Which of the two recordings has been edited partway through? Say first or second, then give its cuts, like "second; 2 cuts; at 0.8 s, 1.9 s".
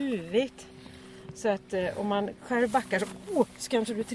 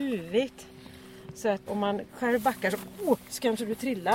second; 1 cut; at 1.7 s